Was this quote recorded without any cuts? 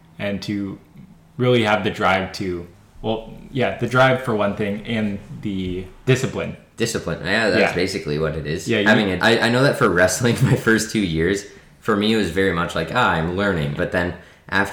no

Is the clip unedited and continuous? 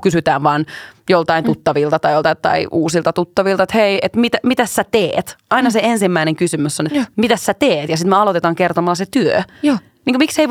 no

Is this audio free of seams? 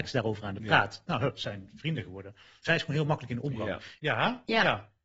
no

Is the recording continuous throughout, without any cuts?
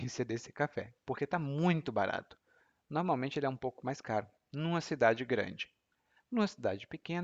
yes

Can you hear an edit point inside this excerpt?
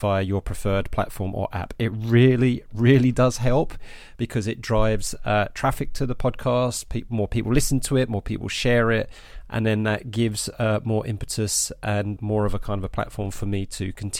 yes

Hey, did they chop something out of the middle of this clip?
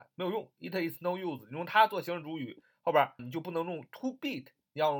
yes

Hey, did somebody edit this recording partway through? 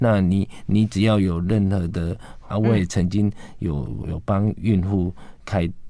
yes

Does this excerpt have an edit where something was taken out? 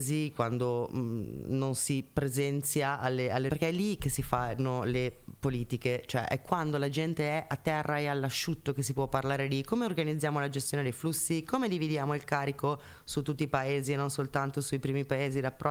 yes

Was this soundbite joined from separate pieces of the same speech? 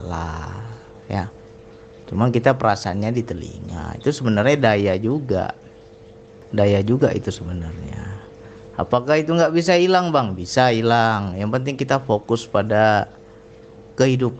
no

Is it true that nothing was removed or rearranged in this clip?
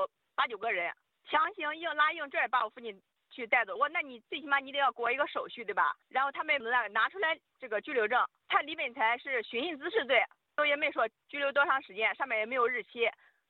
yes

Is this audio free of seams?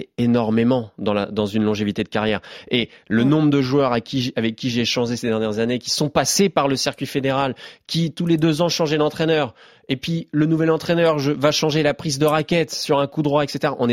yes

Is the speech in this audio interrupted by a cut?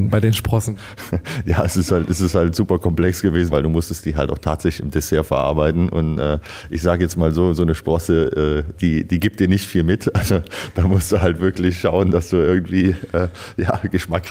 yes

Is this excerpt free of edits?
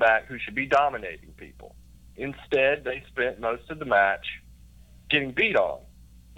yes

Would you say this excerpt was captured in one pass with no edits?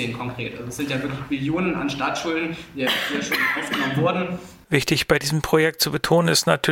no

